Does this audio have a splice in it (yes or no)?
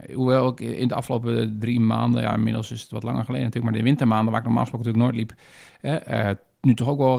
no